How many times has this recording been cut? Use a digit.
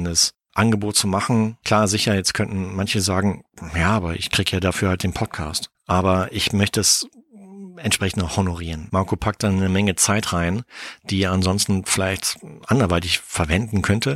1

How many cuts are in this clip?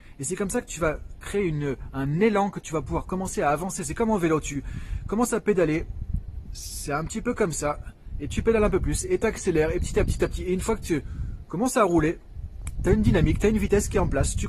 1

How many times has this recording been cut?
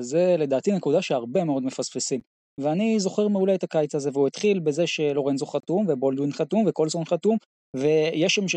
1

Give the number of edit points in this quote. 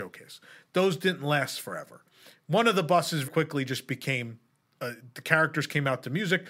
1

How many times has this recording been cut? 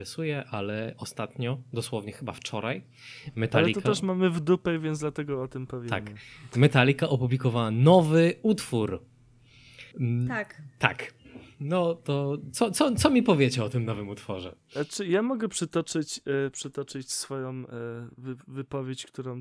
1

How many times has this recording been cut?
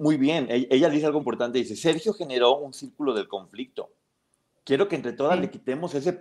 1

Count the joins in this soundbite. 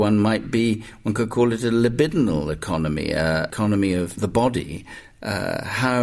1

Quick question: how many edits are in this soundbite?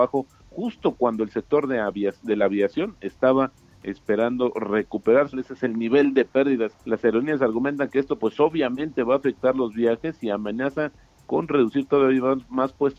2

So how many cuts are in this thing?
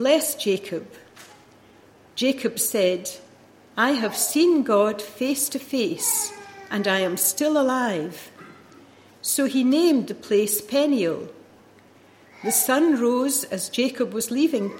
0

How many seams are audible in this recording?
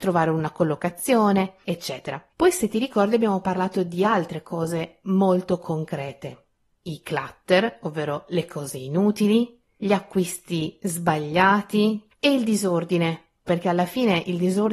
3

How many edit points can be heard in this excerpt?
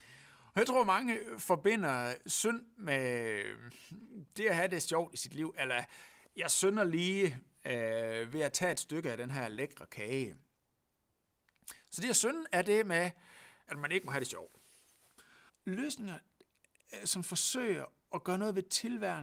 2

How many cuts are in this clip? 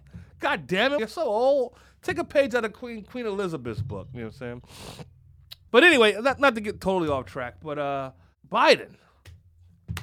2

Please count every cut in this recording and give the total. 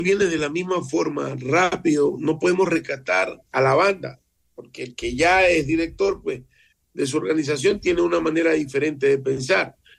1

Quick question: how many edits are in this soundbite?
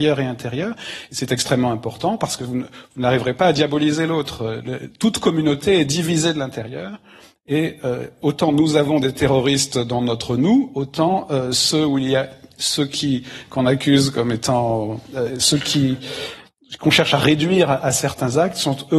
0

